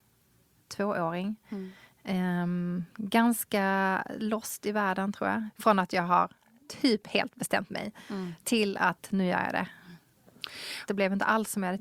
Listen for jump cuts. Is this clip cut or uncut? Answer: cut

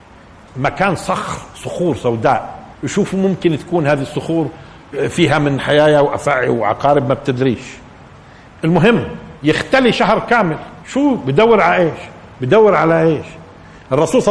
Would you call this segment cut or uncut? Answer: cut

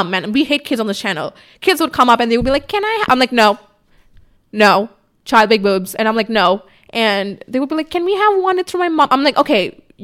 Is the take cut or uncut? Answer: uncut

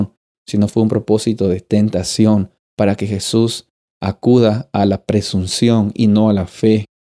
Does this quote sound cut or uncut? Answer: uncut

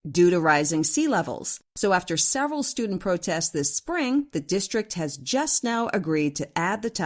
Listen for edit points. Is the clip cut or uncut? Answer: cut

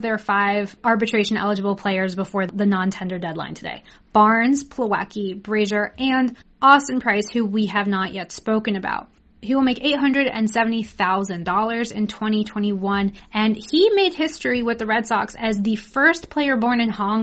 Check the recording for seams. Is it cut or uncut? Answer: uncut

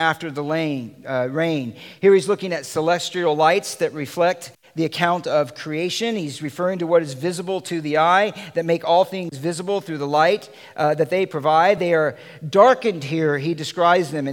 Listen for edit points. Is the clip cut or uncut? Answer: uncut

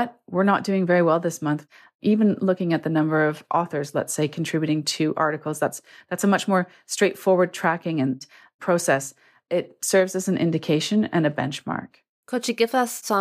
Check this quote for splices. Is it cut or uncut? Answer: uncut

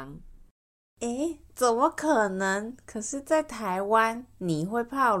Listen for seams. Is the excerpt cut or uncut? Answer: uncut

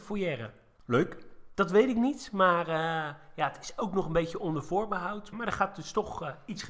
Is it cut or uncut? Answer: cut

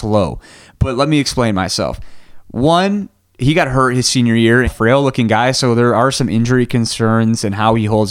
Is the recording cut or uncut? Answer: cut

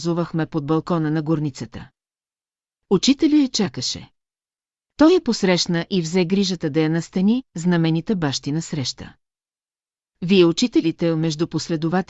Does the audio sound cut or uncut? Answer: uncut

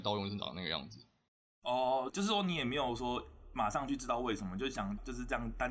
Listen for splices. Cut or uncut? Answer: uncut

